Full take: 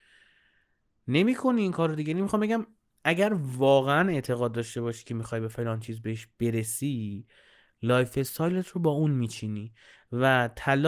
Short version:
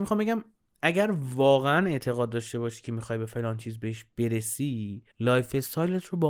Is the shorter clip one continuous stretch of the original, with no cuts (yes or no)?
no